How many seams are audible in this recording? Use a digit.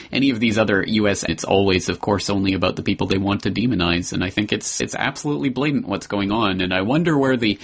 2